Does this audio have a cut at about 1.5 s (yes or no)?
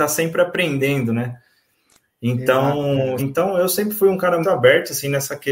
no